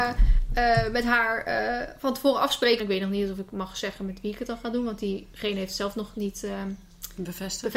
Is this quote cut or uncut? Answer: cut